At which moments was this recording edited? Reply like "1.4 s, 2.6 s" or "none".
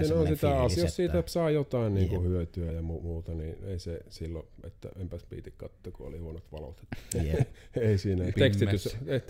8.3 s